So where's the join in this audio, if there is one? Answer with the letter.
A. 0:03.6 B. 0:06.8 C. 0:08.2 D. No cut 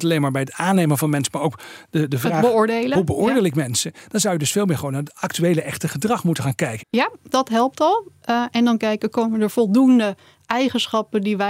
B